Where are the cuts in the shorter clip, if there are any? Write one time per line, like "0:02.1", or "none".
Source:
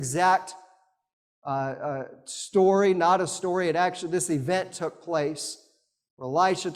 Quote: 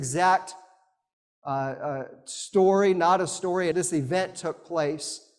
0:03.7